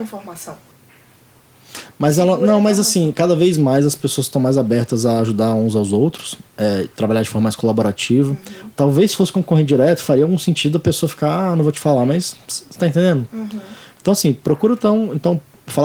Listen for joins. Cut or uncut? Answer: cut